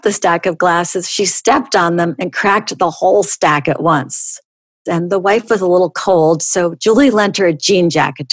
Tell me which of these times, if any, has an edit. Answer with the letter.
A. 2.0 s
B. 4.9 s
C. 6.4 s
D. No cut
B